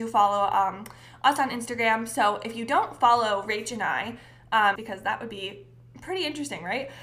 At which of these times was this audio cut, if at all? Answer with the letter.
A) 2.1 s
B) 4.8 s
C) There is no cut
B